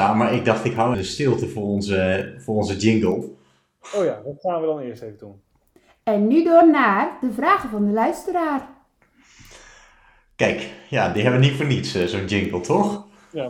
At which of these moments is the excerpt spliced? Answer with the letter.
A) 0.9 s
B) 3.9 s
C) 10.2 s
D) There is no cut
A